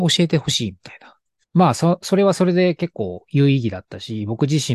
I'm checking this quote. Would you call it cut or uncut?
cut